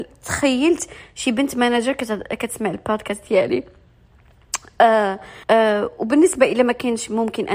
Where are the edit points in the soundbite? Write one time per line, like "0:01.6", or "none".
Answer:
0:05.4